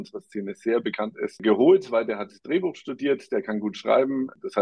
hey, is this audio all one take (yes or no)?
yes